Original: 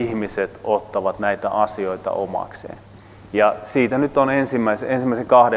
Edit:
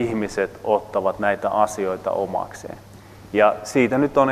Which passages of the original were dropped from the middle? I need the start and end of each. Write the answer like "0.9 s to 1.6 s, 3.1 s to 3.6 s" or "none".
none